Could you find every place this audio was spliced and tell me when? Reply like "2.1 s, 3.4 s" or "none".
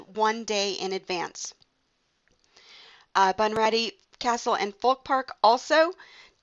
none